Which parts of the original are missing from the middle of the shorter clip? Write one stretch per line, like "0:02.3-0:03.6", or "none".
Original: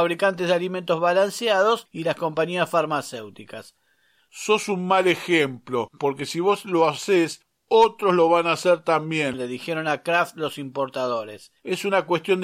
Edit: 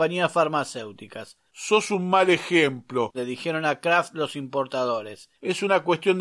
0:03.8-0:04.2
0:05.9-0:09.4